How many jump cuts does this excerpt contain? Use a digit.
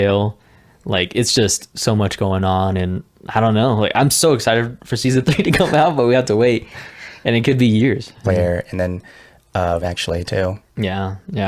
2